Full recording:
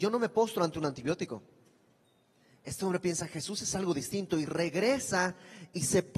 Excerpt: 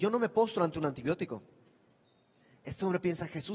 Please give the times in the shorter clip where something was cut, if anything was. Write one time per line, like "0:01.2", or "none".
none

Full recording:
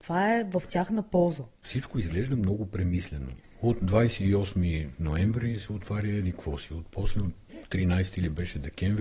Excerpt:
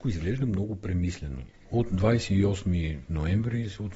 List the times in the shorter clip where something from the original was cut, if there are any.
none

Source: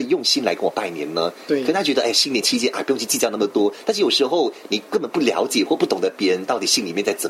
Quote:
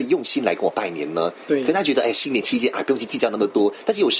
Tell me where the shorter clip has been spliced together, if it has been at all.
none

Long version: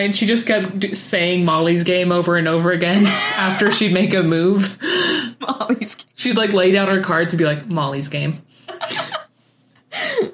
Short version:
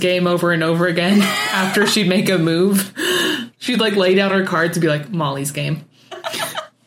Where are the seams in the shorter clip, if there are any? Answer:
0:03.5

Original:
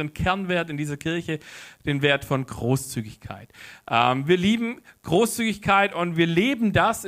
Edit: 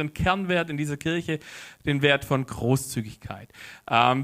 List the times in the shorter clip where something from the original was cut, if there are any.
none

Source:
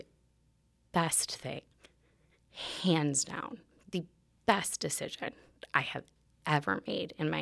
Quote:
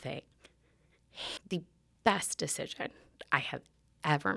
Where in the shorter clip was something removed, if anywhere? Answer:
0:01.4

